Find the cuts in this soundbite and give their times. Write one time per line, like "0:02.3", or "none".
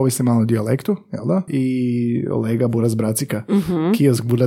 0:01.5

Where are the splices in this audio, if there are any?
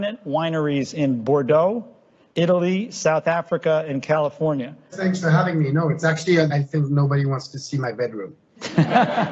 0:04.9
0:06.5

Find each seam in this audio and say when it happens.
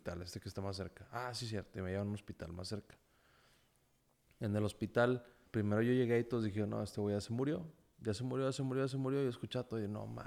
0:05.5

